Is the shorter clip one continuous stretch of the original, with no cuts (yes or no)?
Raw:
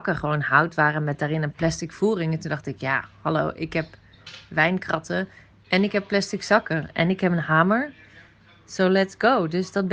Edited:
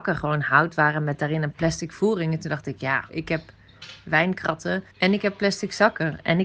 no